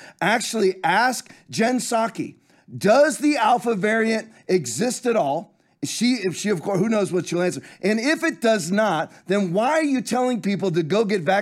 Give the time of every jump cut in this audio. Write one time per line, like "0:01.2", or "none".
none